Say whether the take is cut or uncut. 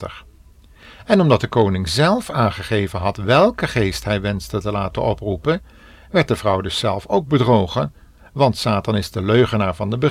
uncut